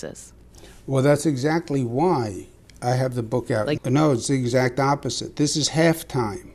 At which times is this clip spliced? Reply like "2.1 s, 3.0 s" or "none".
3.8 s